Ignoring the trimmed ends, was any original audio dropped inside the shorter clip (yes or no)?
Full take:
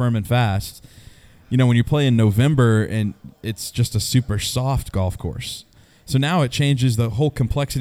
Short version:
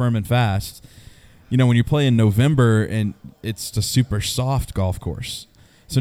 yes